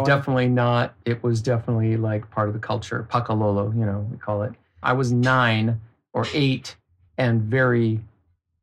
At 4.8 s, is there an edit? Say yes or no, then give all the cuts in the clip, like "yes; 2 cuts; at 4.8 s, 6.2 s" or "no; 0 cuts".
yes; 1 cut; at 4.8 s